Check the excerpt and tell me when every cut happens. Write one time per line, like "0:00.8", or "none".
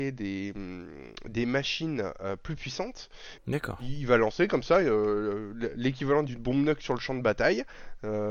0:03.4